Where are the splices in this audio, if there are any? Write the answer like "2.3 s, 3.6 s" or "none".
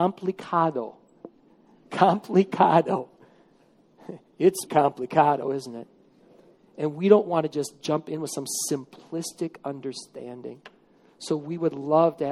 4.7 s